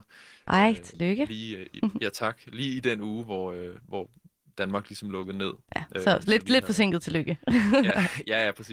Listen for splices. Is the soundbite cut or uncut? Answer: uncut